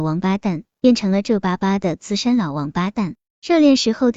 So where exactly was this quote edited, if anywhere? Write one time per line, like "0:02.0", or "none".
none